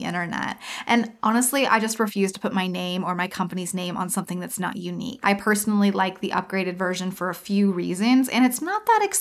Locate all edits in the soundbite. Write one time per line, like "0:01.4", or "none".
0:05.2